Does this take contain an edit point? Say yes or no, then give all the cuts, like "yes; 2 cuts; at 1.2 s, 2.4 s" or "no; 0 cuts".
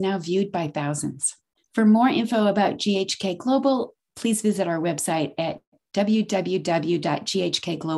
yes; 1 cut; at 1.6 s